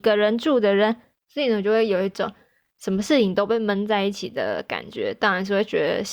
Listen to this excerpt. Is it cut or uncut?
cut